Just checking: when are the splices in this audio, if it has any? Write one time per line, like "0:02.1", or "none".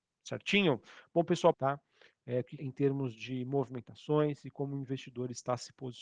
0:01.5
0:02.6